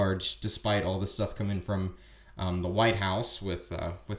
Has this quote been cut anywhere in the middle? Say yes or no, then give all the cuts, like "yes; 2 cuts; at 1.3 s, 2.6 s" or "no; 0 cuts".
no; 0 cuts